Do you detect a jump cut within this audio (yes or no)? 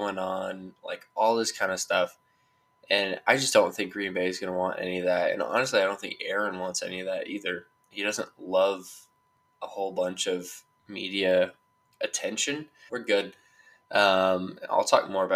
yes